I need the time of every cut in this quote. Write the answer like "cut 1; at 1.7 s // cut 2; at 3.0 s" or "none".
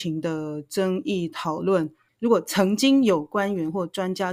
cut 1; at 2.1 s